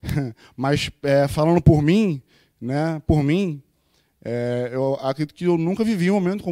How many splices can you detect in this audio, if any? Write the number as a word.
zero